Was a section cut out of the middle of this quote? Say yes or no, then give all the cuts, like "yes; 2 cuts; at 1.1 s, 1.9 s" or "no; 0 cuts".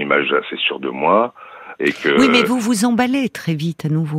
yes; 1 cut; at 1.8 s